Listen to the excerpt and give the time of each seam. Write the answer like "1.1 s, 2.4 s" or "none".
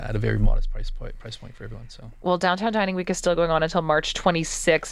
none